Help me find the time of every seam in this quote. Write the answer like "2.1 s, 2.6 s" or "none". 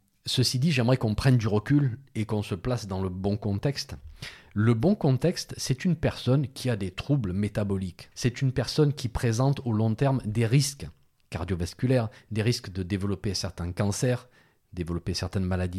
8.1 s